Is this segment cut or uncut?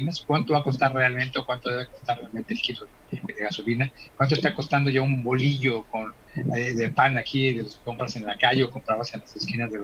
cut